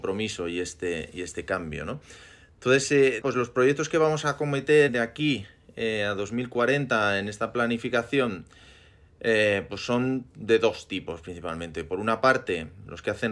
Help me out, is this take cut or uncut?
cut